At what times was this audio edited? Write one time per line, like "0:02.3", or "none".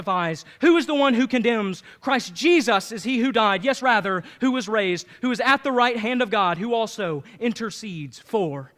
none